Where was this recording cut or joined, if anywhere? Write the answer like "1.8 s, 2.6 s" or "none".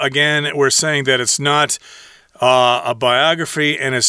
none